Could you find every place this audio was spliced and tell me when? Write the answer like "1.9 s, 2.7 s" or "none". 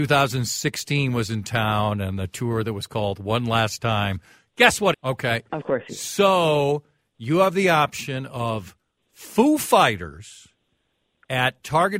4.9 s

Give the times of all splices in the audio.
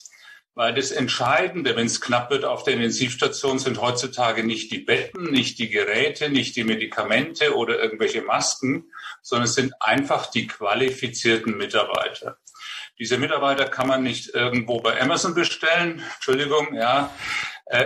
none

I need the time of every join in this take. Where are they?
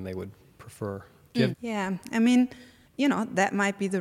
1.5 s, 2.9 s

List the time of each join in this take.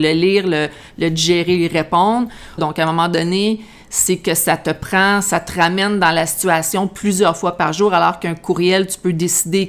2.6 s

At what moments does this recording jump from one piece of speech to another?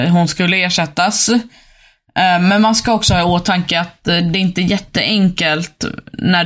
none

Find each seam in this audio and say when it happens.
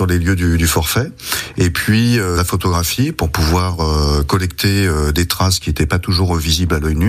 2.4 s

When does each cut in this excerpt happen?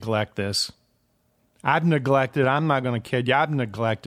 none

